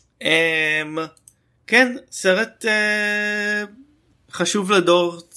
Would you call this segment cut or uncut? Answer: cut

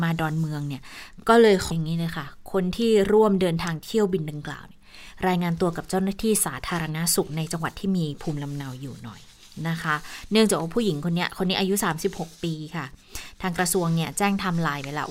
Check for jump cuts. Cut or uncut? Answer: cut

